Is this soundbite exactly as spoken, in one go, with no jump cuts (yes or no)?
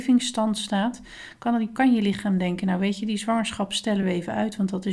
yes